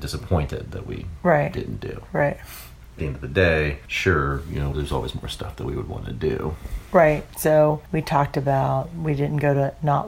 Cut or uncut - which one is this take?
cut